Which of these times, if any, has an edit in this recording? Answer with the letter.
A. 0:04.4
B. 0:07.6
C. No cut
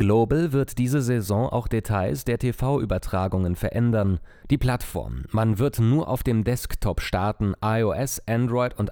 A